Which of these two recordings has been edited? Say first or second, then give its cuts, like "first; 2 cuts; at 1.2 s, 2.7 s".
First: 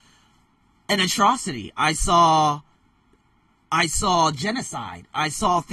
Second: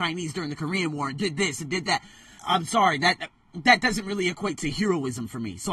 second; 1 cut; at 2.4 s